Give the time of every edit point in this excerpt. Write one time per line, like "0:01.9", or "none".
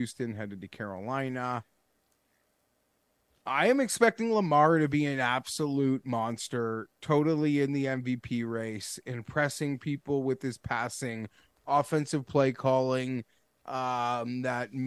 none